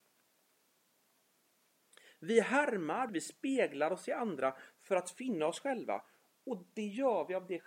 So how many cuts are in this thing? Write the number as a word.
one